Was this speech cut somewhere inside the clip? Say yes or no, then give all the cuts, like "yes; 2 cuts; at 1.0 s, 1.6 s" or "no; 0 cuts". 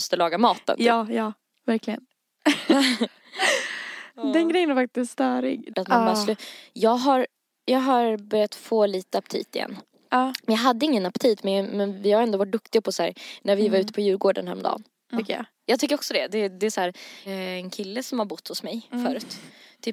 yes; 3 cuts; at 5.7 s, 15.2 s, 17.3 s